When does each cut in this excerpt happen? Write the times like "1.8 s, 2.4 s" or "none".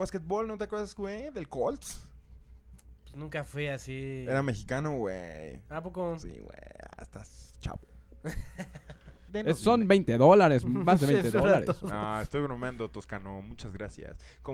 9.3 s